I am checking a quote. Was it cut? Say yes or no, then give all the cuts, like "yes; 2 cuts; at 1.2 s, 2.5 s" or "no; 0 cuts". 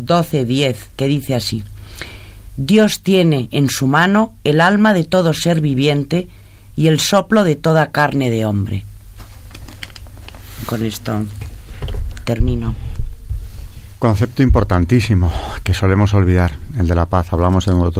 no; 0 cuts